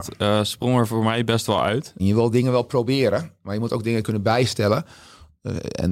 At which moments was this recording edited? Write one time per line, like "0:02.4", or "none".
0:02.0